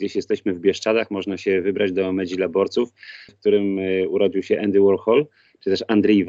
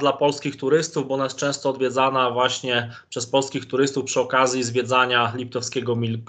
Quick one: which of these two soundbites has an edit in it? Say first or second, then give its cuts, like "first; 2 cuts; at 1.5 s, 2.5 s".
first; 1 cut; at 3.3 s